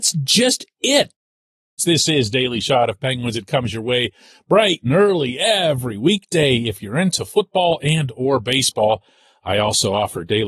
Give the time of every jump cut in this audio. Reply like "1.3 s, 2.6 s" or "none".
1.8 s